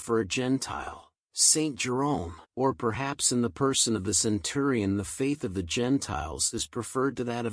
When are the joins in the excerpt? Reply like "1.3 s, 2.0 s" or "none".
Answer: 1.2 s, 2.5 s